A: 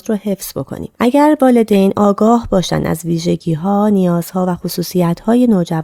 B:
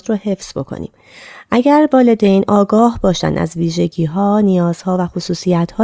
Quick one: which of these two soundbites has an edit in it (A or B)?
A